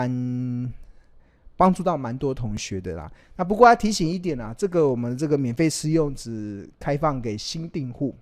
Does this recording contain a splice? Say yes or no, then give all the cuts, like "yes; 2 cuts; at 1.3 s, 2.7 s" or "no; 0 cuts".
yes; 1 cut; at 3.2 s